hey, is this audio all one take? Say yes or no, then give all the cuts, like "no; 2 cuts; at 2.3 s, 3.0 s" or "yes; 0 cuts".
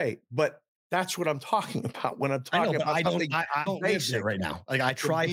no; 1 cut; at 3.7 s